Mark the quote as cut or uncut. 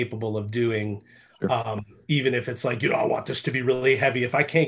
uncut